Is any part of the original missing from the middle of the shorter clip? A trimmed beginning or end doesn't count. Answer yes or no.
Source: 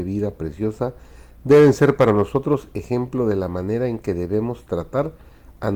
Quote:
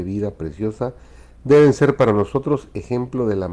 no